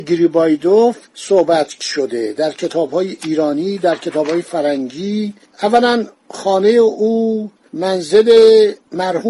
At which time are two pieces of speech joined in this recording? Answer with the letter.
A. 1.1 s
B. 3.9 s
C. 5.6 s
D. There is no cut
A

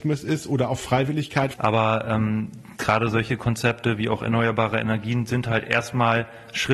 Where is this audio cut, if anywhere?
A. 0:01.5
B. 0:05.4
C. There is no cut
A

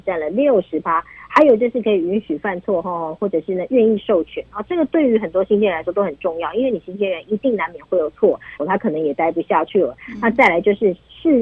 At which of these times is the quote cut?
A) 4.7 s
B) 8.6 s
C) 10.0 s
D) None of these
B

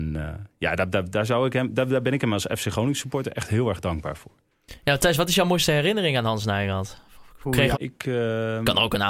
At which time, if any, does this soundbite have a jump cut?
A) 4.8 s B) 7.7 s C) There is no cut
B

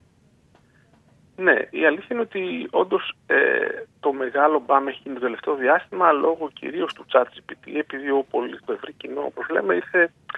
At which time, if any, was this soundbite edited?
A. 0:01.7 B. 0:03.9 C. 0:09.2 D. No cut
A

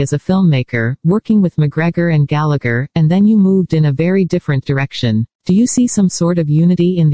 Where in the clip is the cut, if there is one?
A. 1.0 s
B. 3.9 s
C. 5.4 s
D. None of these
C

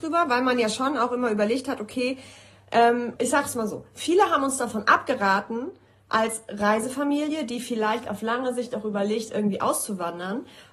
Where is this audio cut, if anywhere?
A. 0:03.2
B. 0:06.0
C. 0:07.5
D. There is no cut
A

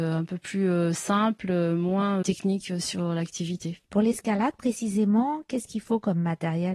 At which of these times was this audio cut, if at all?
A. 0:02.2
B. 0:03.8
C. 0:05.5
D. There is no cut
B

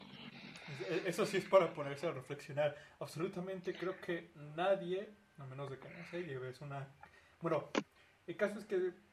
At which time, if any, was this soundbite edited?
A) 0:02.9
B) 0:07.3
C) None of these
C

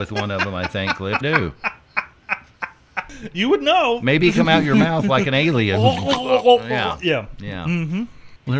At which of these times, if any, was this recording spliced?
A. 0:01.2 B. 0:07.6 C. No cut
A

